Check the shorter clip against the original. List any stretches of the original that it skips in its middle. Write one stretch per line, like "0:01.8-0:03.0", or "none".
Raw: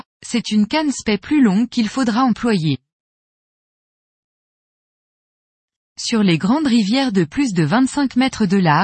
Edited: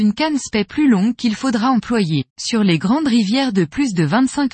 0:02.8-0:05.9